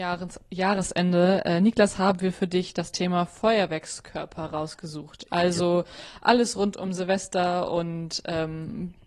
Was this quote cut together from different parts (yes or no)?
no